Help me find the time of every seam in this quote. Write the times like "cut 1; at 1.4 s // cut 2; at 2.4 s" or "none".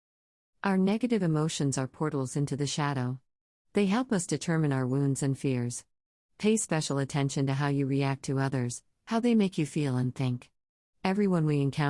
none